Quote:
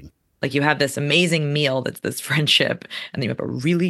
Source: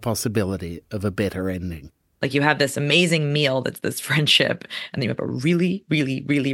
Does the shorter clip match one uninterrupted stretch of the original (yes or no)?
yes